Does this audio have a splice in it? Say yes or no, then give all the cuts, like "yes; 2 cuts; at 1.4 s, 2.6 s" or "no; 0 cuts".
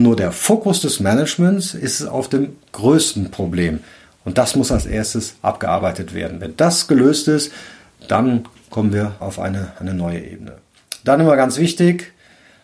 yes; 1 cut; at 9.2 s